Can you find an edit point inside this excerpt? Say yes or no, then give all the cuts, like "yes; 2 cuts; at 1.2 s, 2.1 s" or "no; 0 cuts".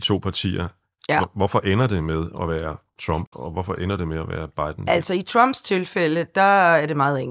no; 0 cuts